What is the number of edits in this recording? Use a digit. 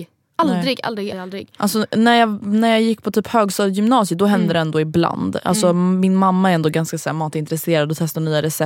1